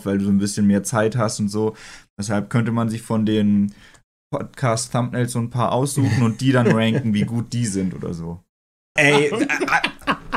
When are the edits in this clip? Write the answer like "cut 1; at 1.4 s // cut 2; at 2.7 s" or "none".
cut 1; at 9.0 s